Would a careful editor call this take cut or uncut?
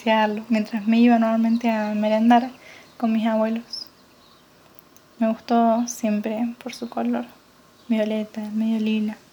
uncut